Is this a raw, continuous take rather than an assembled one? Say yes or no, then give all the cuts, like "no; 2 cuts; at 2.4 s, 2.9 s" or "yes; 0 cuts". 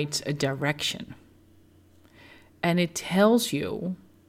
yes; 0 cuts